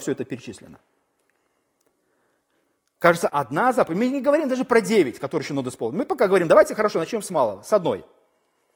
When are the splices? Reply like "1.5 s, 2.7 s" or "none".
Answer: 3.3 s